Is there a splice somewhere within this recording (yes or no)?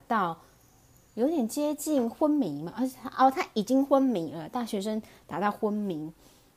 no